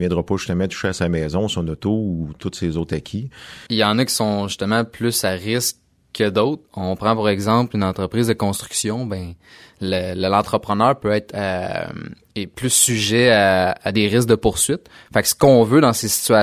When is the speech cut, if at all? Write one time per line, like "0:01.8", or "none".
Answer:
0:03.7